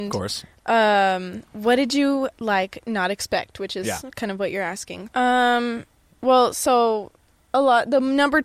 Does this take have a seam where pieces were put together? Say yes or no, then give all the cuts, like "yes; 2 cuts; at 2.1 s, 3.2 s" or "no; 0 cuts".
yes; 2 cuts; at 2.3 s, 5.1 s